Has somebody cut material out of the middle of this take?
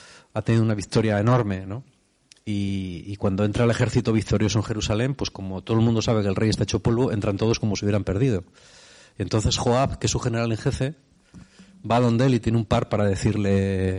no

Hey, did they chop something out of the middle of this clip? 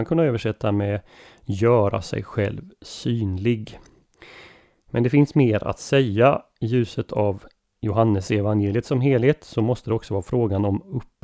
no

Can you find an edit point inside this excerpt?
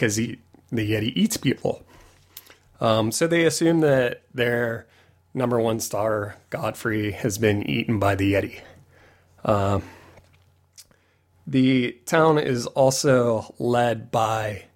no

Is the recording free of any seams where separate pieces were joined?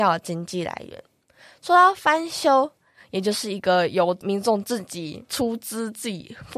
no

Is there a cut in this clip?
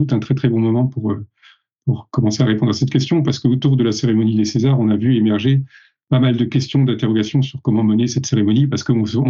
no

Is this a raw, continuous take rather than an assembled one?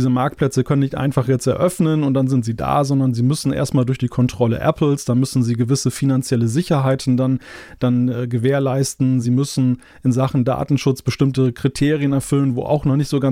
yes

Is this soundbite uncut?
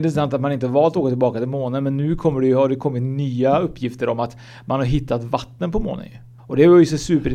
no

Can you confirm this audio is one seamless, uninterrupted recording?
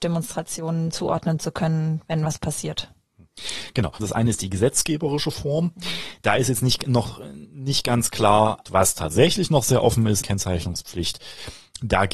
no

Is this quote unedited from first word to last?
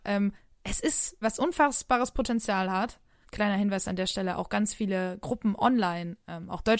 no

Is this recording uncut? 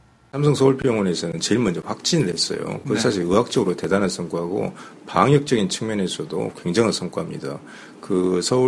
yes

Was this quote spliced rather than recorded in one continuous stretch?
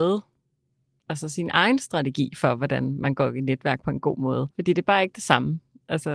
yes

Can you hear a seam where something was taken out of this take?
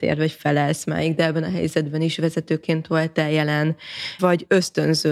yes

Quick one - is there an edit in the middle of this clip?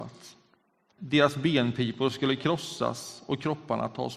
yes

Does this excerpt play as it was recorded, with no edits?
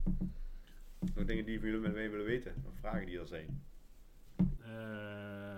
no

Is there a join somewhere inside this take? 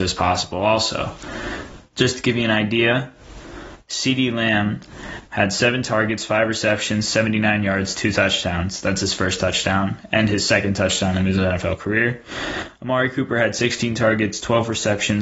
no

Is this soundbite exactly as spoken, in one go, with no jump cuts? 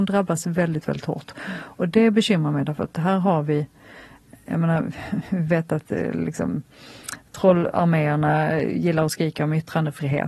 yes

